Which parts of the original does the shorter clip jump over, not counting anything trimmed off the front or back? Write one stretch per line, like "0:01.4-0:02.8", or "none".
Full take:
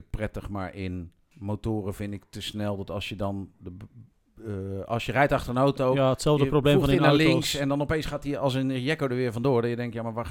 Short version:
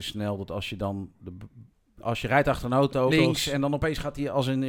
0:04.4-0:04.8
0:05.9-0:07.2